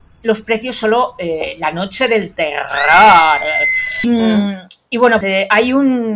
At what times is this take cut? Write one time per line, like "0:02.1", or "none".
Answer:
0:04.0
0:05.2